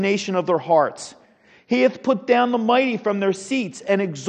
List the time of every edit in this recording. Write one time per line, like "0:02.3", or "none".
none